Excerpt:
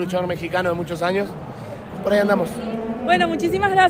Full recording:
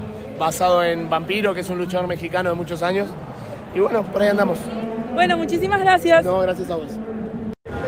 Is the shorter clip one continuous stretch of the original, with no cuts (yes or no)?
no